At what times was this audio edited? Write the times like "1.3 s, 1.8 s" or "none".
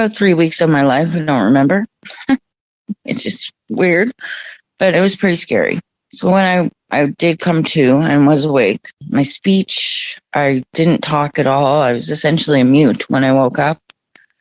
none